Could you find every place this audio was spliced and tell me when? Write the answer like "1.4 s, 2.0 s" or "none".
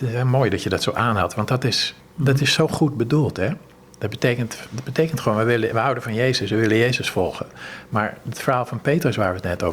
none